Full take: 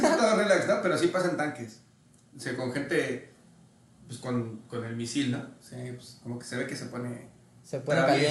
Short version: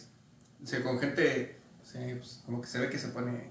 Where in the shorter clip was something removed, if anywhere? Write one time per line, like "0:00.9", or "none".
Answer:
0:01.8